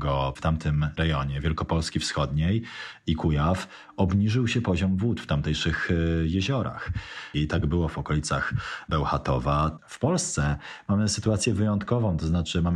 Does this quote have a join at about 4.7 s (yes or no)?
no